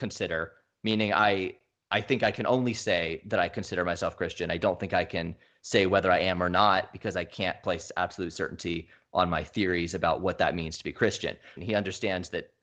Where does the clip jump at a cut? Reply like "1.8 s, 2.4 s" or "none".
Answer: 11.6 s